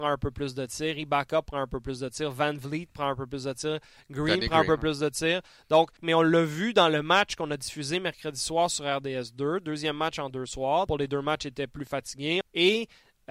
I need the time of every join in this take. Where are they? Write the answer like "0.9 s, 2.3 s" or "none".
6.0 s, 10.9 s, 12.4 s

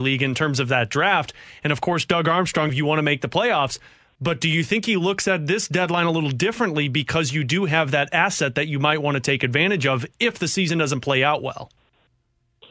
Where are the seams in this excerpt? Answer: 2.7 s

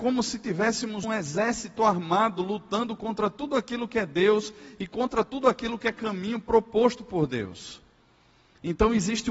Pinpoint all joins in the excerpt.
1.0 s

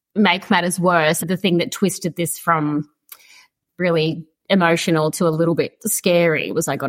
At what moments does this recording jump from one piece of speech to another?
1.2 s

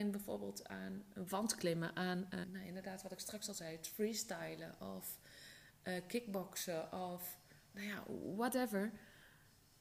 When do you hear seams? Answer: 1.1 s, 2.4 s

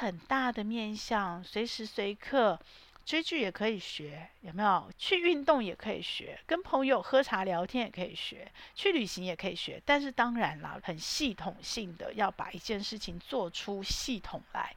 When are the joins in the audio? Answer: 4.9 s, 10.8 s

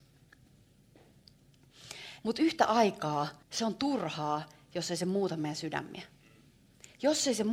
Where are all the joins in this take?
2.2 s, 3.4 s

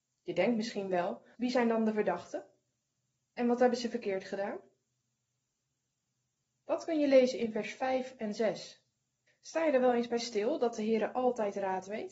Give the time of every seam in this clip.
1.3 s, 9.3 s

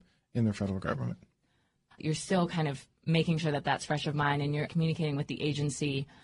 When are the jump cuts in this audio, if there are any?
1.9 s, 4.7 s

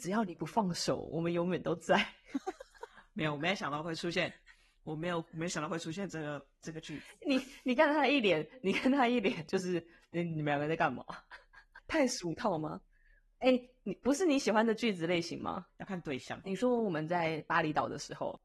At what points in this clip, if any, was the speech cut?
16.4 s

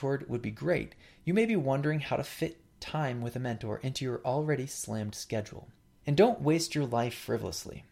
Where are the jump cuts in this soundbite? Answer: 5.9 s

